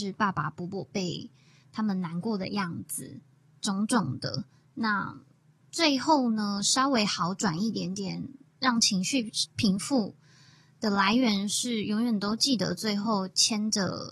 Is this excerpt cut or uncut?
uncut